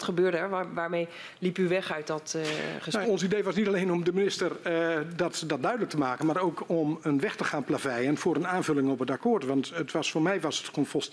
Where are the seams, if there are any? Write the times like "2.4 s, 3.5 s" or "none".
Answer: 3.0 s